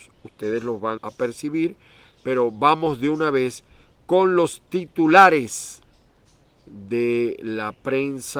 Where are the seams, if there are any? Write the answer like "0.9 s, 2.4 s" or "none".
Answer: 1.0 s